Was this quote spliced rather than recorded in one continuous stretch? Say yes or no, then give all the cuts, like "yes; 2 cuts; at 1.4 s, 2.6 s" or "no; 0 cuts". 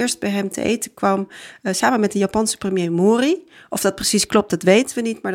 no; 0 cuts